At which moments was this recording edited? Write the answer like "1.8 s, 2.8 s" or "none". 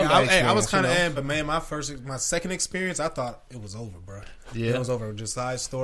none